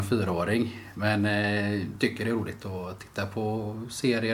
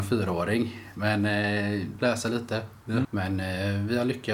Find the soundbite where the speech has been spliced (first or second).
second